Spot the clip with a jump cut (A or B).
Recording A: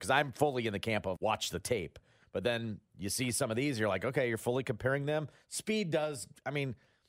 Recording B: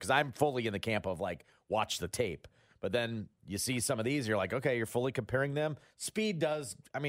A